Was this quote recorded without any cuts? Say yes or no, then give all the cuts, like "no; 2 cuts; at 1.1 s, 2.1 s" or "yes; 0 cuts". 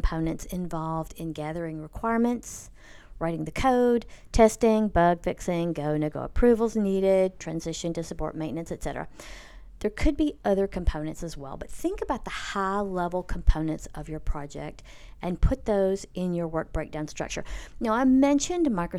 no; 1 cut; at 7.4 s